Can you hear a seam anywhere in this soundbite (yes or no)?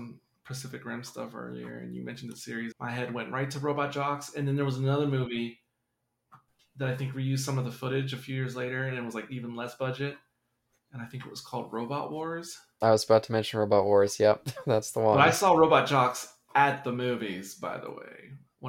yes